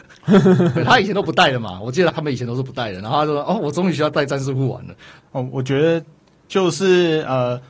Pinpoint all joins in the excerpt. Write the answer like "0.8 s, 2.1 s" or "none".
2.1 s, 5.2 s